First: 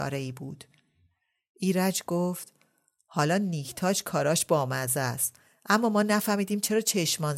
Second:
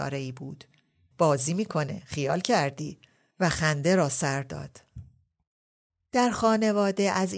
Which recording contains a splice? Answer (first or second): second